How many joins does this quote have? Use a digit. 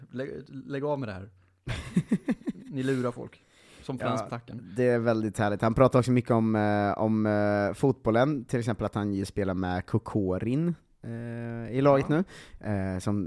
1